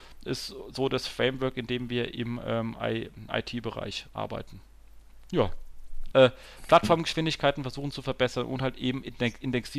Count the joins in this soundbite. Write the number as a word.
two